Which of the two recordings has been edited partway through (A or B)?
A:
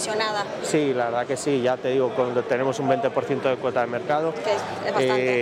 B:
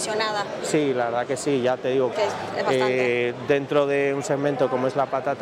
B